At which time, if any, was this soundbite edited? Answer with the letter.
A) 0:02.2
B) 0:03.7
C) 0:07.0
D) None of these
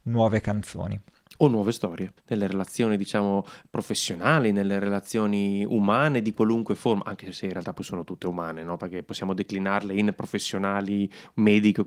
A